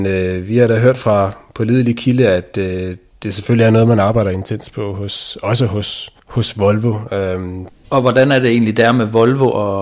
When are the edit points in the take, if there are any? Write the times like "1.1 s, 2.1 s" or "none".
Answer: 6.2 s, 7.7 s